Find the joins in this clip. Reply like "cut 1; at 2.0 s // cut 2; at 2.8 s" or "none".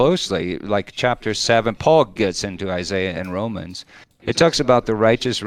cut 1; at 2.2 s